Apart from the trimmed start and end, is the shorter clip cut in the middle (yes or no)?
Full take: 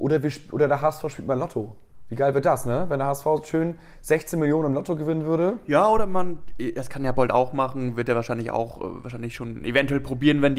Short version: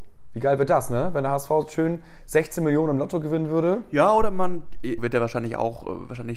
yes